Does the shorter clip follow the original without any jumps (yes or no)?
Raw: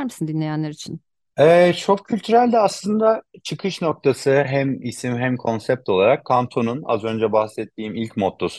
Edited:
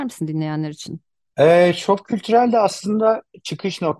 yes